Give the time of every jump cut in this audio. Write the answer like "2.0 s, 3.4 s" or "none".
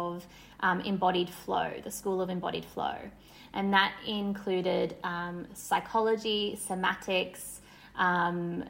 none